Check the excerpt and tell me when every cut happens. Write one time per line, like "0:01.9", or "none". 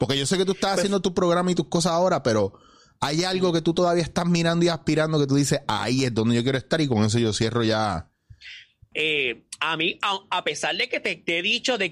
0:08.9

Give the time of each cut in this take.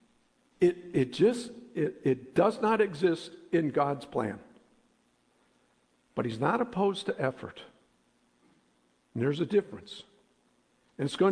none

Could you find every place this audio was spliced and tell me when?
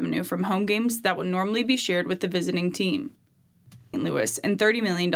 0:03.9

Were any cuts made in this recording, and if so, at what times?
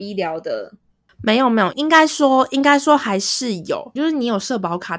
0:01.7
0:04.0

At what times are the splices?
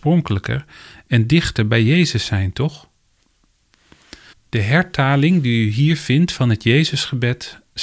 0:04.3

